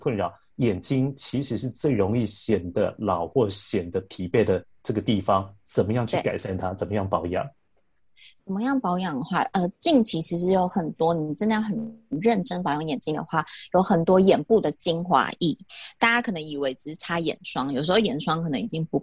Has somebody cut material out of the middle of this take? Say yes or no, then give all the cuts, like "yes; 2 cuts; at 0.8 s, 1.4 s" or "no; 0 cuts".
no; 0 cuts